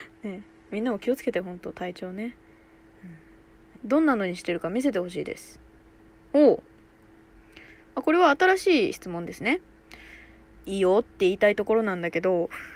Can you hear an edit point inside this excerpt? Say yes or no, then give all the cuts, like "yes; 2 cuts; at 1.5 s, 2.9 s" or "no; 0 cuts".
yes; 2 cuts; at 3.7 s, 10.5 s